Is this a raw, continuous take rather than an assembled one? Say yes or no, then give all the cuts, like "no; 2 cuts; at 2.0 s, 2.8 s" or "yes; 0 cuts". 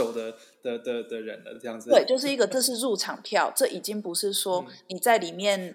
yes; 0 cuts